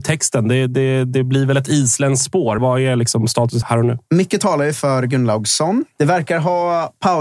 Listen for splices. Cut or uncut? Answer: cut